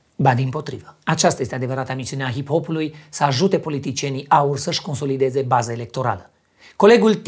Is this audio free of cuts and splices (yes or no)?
no